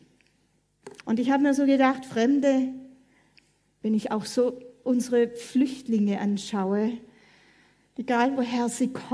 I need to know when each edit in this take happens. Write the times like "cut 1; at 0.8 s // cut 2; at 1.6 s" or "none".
cut 1; at 1.0 s

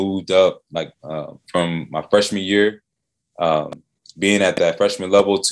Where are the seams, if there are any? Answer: none

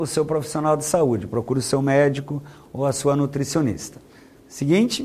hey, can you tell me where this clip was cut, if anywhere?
none

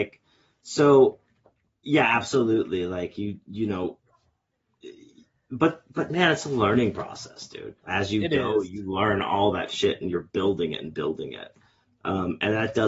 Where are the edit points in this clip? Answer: none

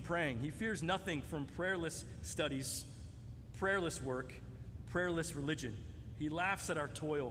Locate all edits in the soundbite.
none

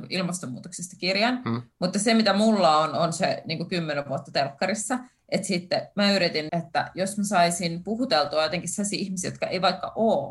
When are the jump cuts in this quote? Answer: cut 1; at 6.5 s

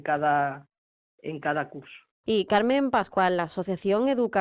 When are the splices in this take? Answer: cut 1; at 2.2 s

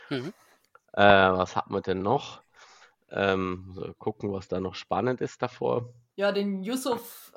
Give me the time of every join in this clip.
none

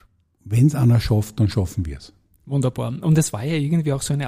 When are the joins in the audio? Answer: none

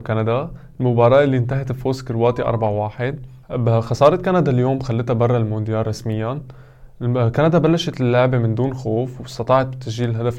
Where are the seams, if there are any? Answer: cut 1; at 3.4 s

